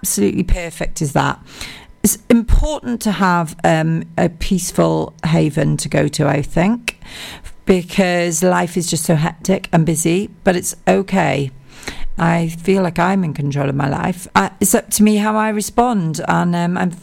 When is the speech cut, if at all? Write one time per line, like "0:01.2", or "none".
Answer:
0:12.2
0:14.3